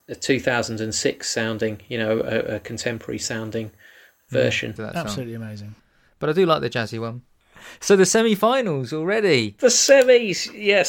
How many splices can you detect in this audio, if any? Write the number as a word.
one